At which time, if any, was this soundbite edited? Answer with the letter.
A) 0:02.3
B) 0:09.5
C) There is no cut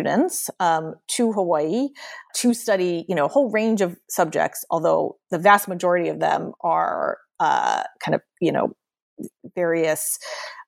A